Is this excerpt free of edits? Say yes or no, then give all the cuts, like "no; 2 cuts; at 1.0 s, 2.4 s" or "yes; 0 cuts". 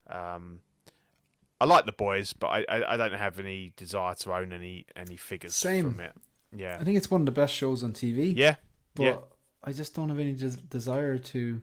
yes; 0 cuts